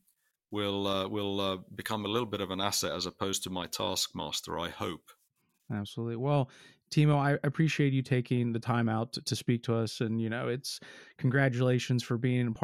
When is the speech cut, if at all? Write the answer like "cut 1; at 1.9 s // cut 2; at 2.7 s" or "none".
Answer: none